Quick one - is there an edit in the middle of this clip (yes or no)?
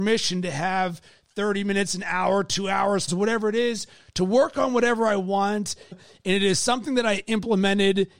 yes